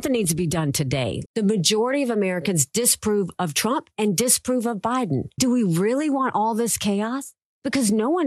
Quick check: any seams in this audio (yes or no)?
yes